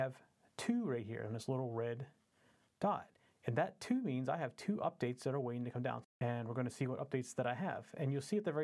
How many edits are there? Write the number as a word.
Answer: one